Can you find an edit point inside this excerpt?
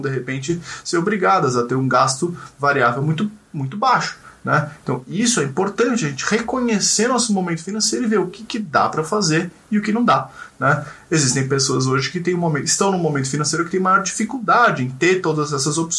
yes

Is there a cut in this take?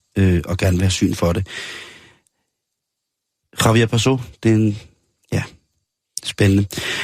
no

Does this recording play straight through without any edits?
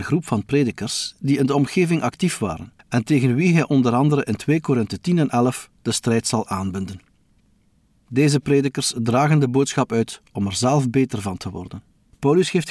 no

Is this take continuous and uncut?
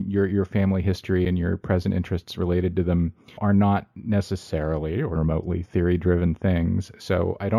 no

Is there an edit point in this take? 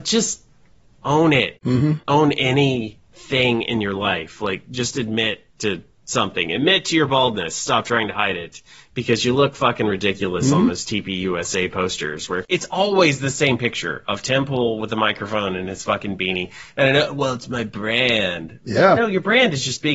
no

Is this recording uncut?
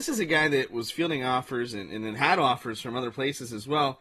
yes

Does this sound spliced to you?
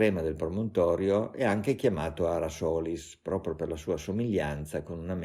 no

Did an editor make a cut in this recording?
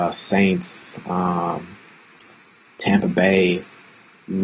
no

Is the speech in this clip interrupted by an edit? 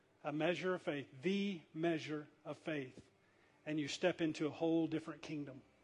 no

